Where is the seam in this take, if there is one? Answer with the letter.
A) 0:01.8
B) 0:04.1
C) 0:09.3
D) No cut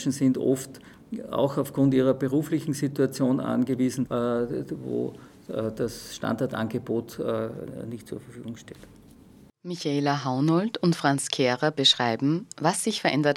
B